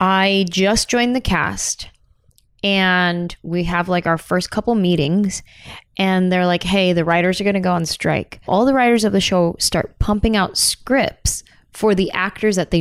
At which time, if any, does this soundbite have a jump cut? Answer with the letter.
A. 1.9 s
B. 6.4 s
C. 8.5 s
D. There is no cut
C